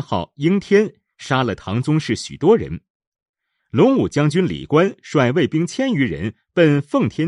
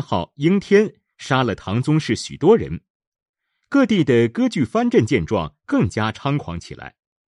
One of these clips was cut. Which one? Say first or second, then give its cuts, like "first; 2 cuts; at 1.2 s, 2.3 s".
first; 1 cut; at 3.6 s